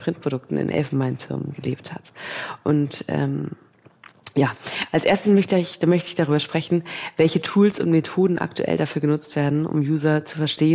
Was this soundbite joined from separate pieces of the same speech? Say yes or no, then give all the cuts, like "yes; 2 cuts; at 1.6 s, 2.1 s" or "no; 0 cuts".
no; 0 cuts